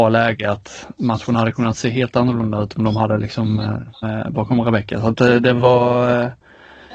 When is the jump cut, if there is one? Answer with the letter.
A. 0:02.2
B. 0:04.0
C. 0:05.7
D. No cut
B